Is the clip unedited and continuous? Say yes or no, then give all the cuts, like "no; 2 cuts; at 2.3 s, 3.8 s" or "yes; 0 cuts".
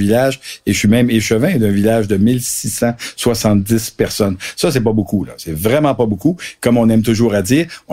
yes; 0 cuts